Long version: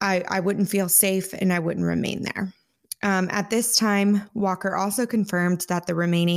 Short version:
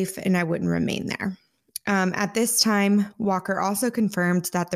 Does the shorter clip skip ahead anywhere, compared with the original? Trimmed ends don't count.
no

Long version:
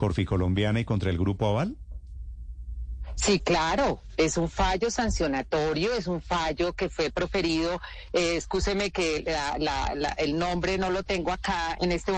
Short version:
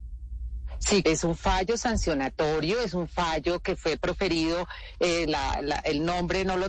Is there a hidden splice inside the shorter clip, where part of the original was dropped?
yes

